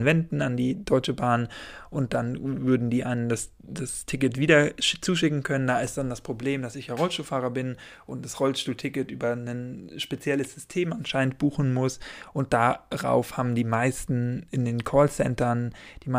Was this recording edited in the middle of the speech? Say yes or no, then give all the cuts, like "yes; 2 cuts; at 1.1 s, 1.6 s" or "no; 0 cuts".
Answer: no; 0 cuts